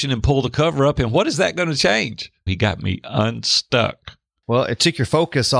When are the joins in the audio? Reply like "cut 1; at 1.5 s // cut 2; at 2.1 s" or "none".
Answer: cut 1; at 2.5 s